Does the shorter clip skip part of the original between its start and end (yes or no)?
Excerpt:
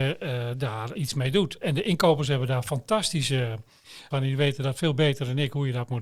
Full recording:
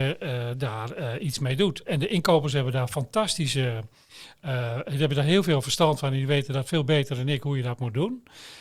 yes